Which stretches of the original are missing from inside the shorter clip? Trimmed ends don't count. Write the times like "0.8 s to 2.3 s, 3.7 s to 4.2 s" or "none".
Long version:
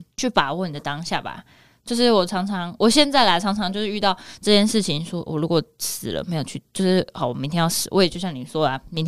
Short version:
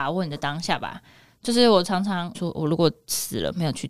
2.8 s to 5.1 s